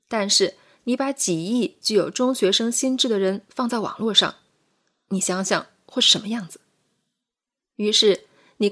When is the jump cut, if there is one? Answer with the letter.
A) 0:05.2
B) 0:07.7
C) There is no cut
B